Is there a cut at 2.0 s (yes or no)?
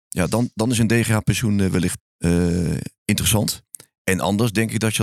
yes